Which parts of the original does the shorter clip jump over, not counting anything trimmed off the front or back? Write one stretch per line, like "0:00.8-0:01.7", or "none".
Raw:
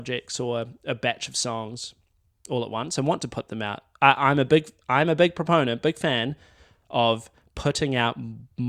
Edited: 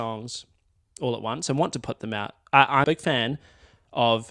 0:04.3-0:05.8